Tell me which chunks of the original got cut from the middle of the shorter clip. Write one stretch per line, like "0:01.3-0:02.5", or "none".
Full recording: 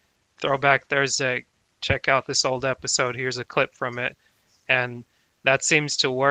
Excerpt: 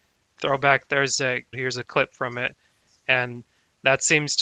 0:01.5-0:03.1